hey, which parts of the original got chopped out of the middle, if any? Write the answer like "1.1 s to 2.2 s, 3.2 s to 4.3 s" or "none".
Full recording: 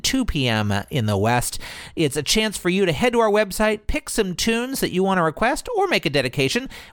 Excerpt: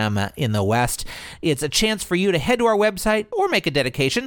3.9 s to 5.7 s

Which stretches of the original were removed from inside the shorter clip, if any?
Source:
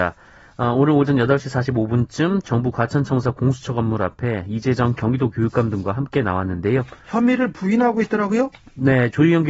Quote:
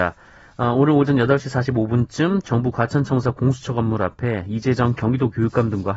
none

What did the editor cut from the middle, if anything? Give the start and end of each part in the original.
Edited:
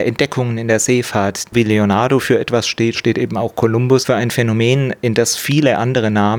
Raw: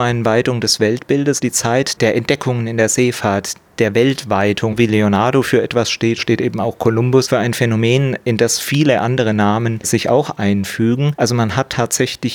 3.6 s to 4.8 s

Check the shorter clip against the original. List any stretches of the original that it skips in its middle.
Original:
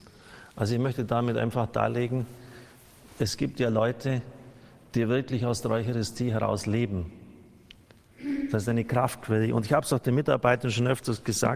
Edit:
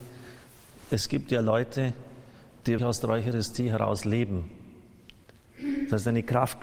5.1 s to 5.4 s

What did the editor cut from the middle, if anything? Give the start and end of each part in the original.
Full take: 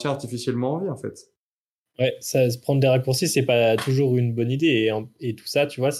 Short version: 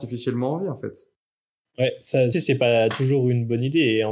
2.5 s to 3.2 s

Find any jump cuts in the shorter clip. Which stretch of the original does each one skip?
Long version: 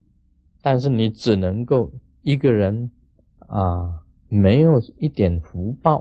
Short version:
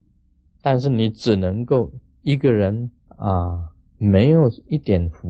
3.0 s to 3.3 s

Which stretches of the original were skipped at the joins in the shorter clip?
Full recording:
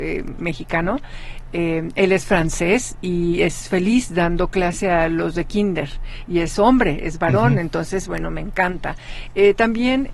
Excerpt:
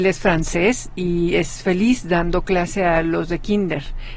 none

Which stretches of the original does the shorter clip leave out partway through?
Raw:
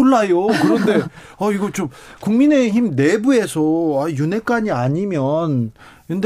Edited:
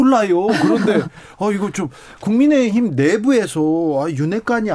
none

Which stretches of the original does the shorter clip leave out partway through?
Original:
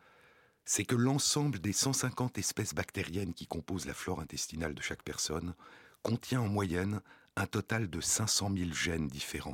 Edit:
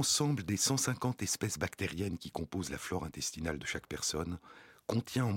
none

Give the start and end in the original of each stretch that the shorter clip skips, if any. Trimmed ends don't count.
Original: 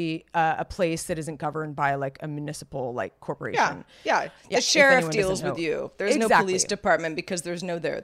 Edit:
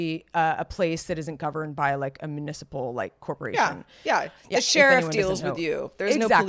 none

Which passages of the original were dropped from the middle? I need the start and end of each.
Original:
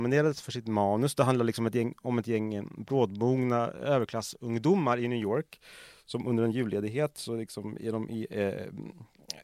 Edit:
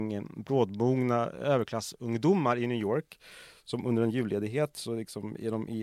none

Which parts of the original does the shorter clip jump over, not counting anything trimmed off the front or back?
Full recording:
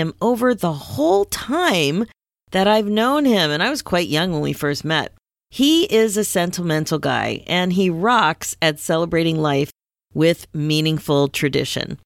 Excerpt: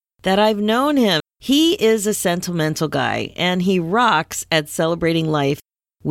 3.5 s to 5.3 s

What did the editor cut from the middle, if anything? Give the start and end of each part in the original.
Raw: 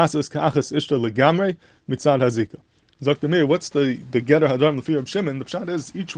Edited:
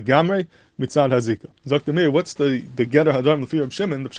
2.7 s to 2.9 s

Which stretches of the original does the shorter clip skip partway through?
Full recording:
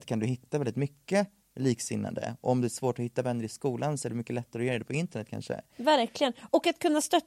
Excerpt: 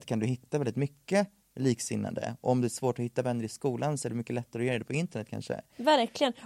none

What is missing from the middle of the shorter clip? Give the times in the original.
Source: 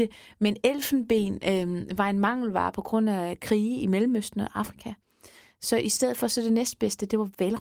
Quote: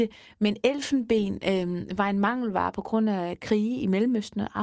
none

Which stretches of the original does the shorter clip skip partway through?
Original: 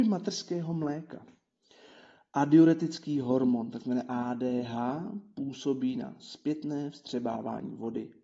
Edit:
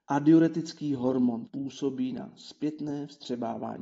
3.7 s to 5.3 s

